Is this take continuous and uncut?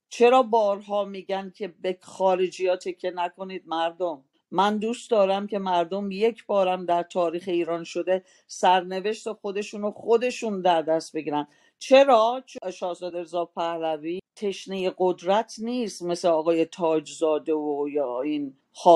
yes; 0 cuts

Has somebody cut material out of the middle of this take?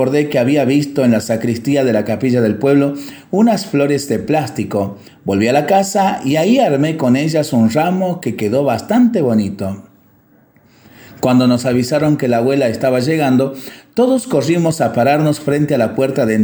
yes; 1 cut; at 5.1 s

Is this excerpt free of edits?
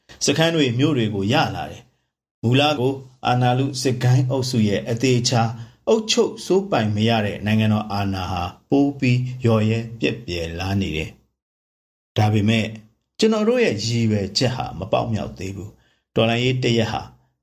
no; 1 cut; at 2.8 s

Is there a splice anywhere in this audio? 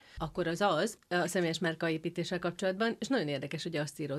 yes; 1 cut; at 3.0 s

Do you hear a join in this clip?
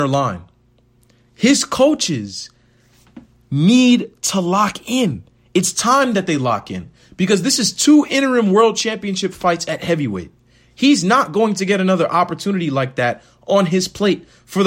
no; 0 cuts

